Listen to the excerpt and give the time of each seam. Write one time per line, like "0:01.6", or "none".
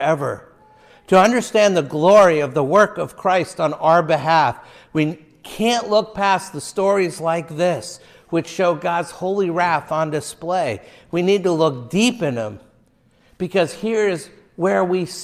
none